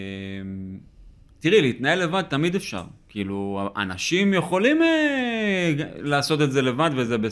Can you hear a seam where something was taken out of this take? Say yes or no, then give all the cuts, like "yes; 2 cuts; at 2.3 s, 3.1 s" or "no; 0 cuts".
no; 0 cuts